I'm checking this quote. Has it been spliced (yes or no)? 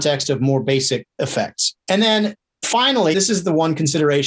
yes